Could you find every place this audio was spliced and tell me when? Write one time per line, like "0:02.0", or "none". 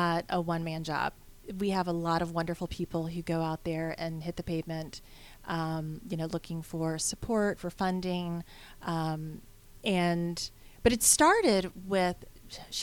none